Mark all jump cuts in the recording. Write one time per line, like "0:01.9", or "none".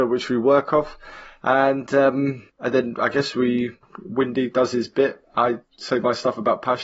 none